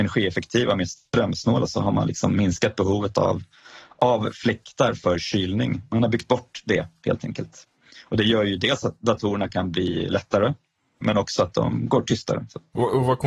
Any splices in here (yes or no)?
yes